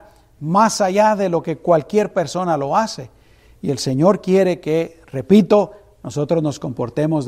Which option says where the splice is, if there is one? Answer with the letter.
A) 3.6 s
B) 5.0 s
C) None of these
C